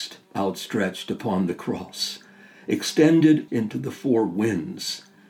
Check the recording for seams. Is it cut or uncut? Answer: cut